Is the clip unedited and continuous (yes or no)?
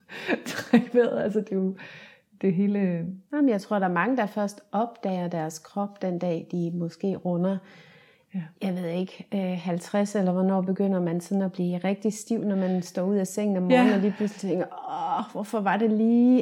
yes